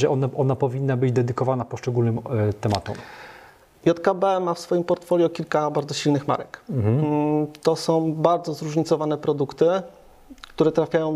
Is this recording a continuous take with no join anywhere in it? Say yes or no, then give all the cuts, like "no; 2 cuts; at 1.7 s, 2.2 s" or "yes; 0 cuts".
yes; 0 cuts